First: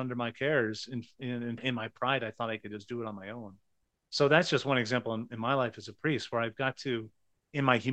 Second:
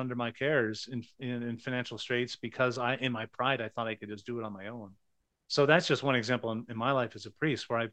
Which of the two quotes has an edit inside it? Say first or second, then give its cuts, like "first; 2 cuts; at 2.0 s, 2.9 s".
first; 1 cut; at 1.6 s